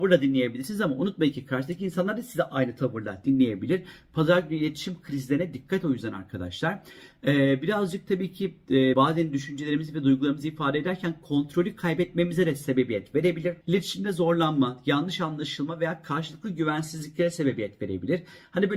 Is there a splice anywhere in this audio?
yes; 2 cuts; at 8.9 s, 13.6 s

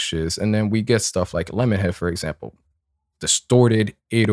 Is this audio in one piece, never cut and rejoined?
yes; 0 cuts

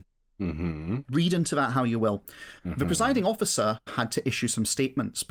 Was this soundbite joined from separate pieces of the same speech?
yes; 1 cut; at 3.9 s

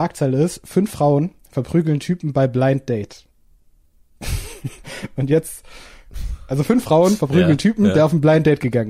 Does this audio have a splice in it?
no; 0 cuts

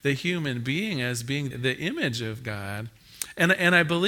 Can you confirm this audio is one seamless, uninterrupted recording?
no; 1 cut; at 1.5 s

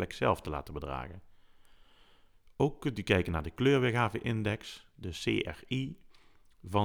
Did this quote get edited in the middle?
no; 0 cuts

